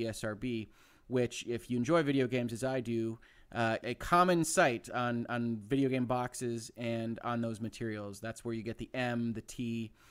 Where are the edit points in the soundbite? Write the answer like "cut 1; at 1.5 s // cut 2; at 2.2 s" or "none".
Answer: cut 1; at 3.8 s